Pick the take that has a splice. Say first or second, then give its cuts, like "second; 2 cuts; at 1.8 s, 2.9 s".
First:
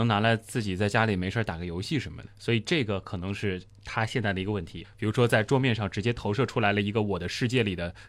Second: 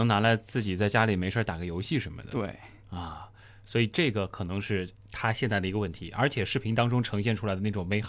first; 2 cuts; at 2.3 s, 4.8 s